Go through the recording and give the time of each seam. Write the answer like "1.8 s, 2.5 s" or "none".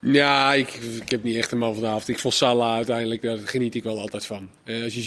none